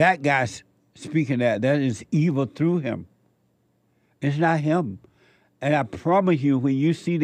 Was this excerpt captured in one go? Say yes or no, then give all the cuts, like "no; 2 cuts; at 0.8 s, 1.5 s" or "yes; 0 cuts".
yes; 0 cuts